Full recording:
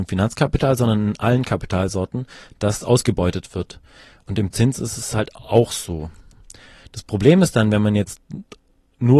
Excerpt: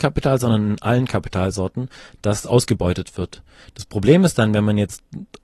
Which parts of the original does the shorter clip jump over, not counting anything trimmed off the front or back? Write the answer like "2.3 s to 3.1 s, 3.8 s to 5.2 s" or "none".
4.0 s to 6.8 s